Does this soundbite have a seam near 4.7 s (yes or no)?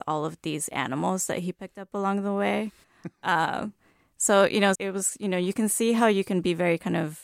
yes